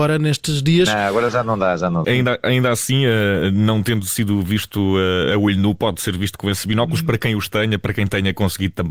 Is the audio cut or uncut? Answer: cut